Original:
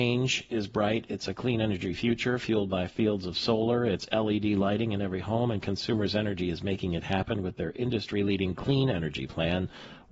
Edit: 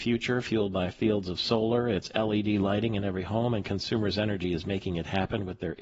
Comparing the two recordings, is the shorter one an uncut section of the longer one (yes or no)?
yes